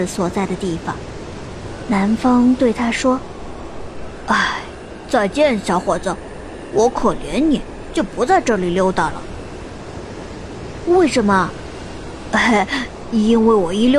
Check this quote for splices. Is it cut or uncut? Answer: uncut